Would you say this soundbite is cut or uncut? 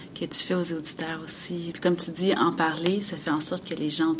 cut